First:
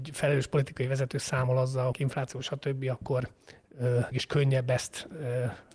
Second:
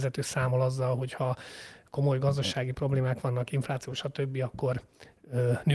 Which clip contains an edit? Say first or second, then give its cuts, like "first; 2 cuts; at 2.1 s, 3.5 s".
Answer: first; 2 cuts; at 1.9 s, 4.1 s